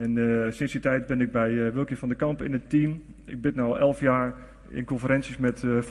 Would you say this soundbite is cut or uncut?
uncut